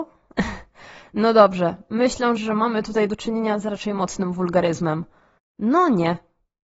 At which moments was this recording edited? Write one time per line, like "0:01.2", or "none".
0:02.4
0:05.4